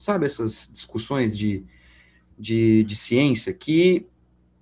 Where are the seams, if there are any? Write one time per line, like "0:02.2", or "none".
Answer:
none